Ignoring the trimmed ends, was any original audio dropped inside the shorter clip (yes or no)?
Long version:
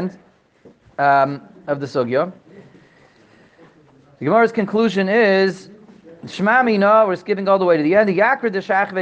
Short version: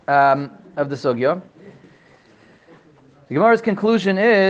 no